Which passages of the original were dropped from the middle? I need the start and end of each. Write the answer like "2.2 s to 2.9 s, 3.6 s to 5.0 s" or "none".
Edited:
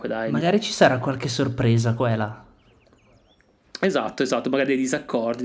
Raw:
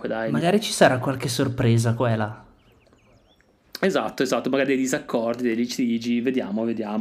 none